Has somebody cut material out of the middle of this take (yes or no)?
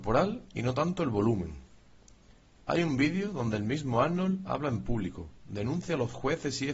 no